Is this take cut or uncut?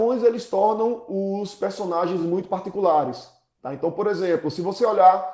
uncut